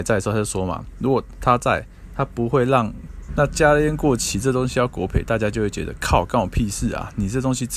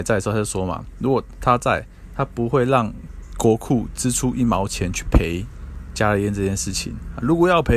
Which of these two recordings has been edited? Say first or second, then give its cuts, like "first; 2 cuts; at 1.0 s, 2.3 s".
first; 1 cut; at 3.3 s